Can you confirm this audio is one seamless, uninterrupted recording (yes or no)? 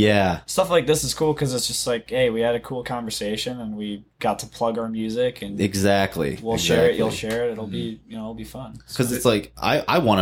yes